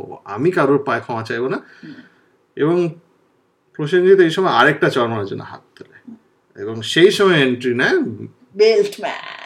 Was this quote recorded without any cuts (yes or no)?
no